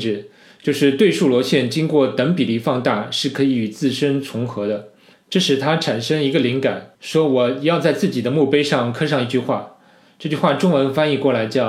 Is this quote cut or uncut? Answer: cut